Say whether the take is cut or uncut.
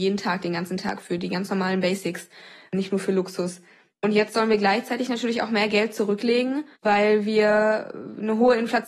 cut